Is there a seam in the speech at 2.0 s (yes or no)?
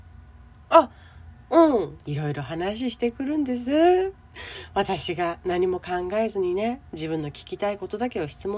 yes